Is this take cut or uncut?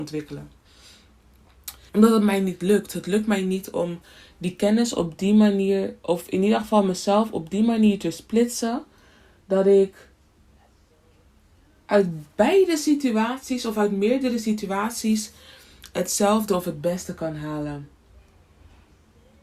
cut